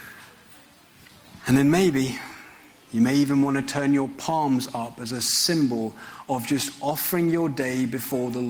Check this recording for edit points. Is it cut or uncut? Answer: uncut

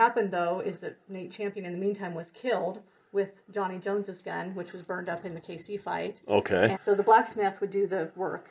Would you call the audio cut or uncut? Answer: cut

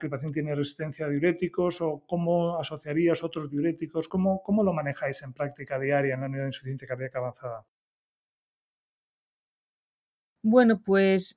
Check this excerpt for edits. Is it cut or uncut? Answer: uncut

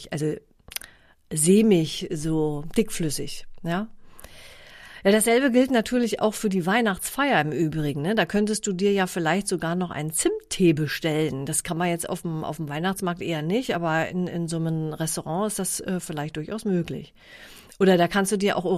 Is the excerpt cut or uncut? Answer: uncut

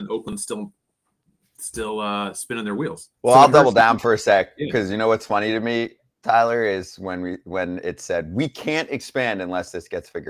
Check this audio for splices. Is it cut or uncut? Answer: cut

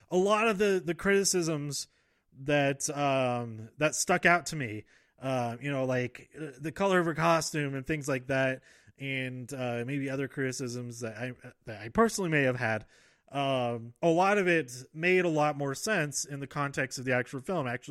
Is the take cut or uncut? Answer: cut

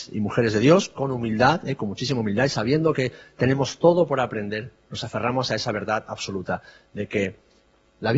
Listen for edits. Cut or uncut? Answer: cut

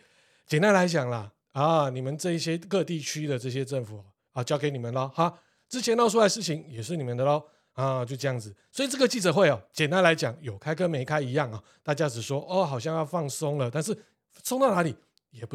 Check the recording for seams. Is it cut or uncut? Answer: cut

